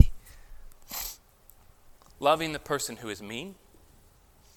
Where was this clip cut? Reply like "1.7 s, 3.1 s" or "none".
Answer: 2.0 s